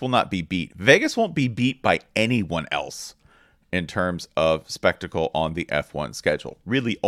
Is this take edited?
no; 0 cuts

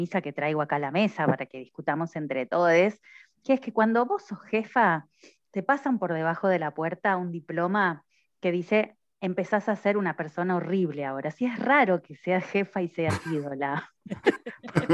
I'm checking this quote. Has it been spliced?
no; 0 cuts

